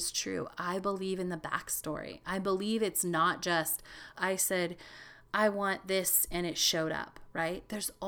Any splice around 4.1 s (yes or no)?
yes